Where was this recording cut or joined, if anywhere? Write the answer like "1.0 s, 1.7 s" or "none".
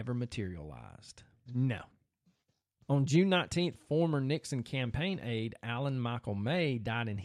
1.5 s, 3.7 s